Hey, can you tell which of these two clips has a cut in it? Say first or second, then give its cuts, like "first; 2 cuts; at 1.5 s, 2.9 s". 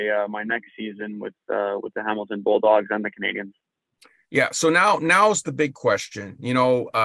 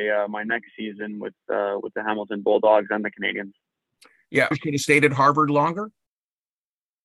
second; 1 cut; at 4.5 s